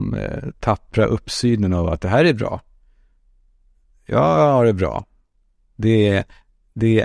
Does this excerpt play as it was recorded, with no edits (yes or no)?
yes